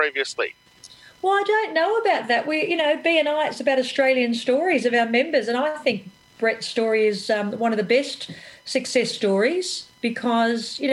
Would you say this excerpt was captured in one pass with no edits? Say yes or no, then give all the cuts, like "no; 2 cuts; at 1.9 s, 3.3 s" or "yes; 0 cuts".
yes; 0 cuts